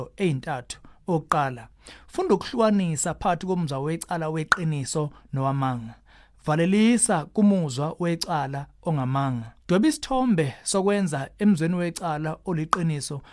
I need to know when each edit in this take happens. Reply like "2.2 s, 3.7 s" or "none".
9.6 s

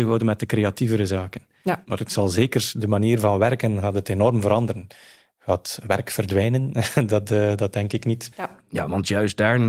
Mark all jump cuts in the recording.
8.3 s

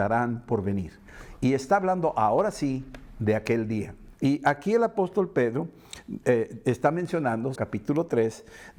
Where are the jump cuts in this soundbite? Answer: 4.1 s, 7.5 s

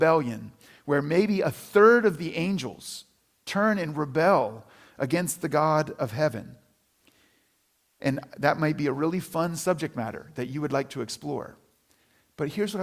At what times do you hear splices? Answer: none

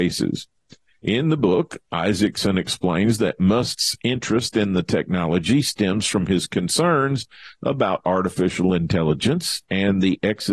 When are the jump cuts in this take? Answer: none

